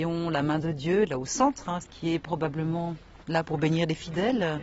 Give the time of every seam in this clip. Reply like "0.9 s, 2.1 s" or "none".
1.8 s, 3.4 s